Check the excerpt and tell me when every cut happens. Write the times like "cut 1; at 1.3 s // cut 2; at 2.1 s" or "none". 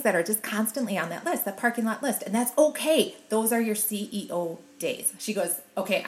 cut 1; at 5.2 s